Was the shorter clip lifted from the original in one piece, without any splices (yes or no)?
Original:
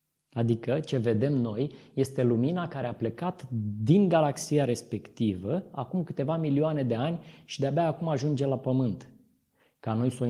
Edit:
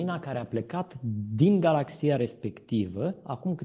yes